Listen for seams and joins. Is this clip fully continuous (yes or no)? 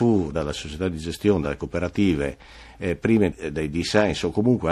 yes